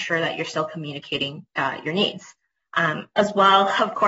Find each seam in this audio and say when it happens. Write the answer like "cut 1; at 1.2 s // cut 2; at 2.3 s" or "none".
none